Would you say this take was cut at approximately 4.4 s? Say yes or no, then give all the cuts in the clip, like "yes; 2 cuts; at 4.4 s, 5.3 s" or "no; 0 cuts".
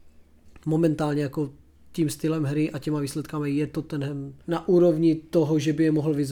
yes; 1 cut; at 4.4 s